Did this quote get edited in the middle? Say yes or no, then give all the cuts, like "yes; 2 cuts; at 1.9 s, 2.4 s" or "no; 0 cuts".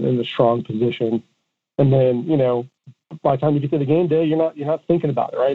no; 0 cuts